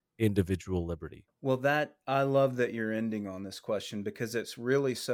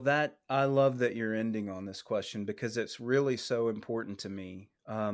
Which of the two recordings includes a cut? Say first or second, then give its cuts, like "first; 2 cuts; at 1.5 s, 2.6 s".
first; 1 cut; at 1.3 s